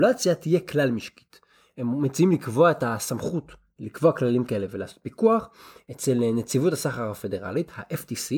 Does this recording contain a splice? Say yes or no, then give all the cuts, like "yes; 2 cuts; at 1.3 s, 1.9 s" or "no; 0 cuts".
no; 0 cuts